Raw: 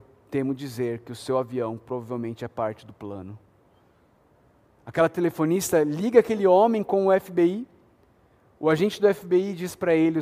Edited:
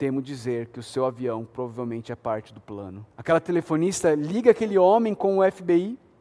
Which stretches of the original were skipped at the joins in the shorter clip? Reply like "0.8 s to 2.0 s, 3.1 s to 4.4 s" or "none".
3.4 s to 4.8 s